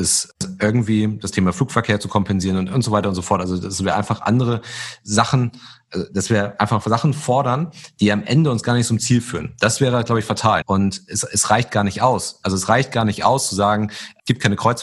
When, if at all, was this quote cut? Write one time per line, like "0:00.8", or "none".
0:10.6